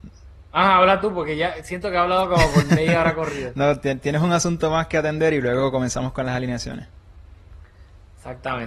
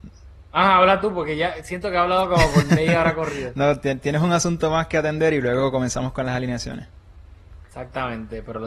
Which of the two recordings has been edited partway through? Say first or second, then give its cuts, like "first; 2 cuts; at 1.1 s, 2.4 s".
second; 1 cut; at 7.7 s